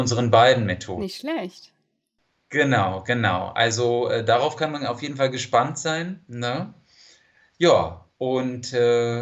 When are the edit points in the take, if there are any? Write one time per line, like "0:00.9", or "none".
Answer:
none